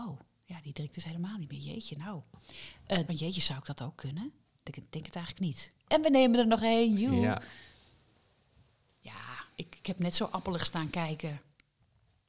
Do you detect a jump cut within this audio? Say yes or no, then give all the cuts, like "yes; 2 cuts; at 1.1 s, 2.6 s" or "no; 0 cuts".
yes; 2 cuts; at 3.1 s, 5.9 s